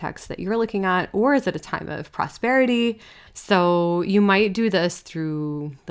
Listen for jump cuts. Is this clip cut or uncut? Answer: cut